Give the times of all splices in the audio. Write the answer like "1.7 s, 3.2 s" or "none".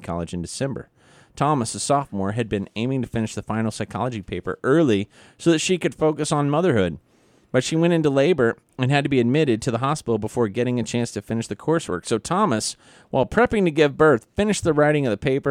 none